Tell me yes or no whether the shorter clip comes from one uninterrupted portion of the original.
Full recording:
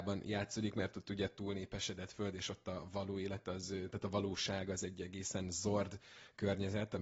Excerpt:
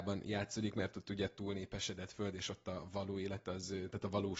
yes